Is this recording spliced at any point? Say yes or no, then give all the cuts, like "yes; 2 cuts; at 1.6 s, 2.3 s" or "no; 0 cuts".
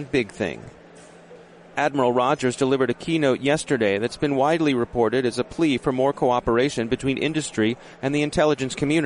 yes; 1 cut; at 1.7 s